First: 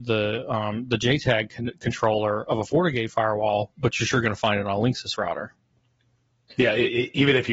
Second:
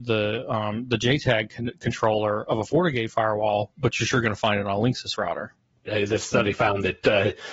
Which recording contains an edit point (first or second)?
second